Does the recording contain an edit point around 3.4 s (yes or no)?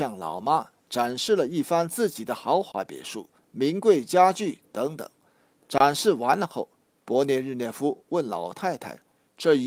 yes